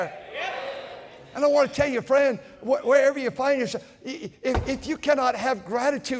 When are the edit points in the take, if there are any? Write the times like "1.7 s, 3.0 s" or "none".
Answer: none